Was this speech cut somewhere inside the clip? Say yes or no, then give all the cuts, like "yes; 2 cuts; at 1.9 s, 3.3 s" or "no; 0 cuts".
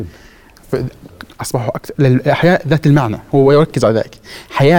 yes; 1 cut; at 1.3 s